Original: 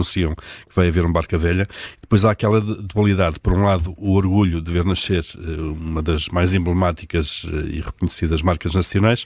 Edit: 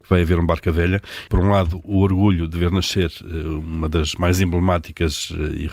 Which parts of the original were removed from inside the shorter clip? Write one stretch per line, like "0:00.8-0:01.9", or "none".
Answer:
0:01.9-0:03.4